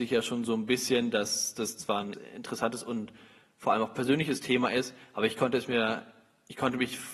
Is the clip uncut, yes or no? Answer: no